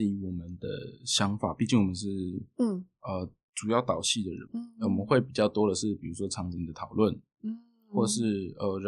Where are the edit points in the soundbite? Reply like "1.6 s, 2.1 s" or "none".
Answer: 4.5 s